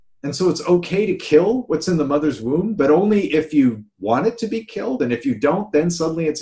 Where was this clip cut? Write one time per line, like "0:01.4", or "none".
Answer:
none